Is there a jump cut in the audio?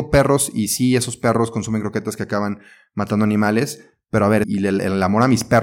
yes; 1 cut; at 4.4 s

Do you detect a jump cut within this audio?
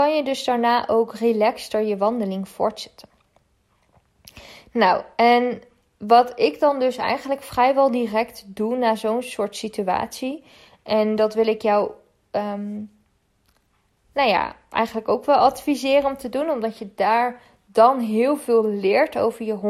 no; 0 cuts

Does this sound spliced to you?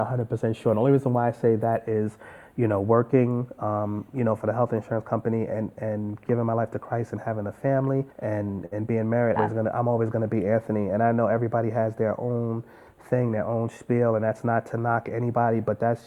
yes; 2 cuts; at 8.1 s, 9.4 s

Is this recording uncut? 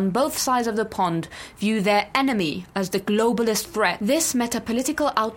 yes; 0 cuts

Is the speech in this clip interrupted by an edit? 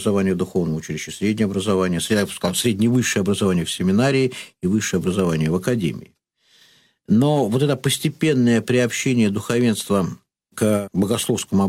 no; 0 cuts

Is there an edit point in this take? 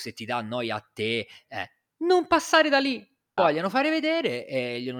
yes; 1 cut; at 3.4 s

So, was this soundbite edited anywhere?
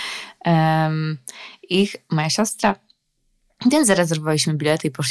no; 0 cuts

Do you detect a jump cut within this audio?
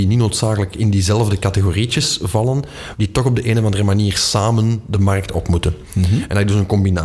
no; 0 cuts

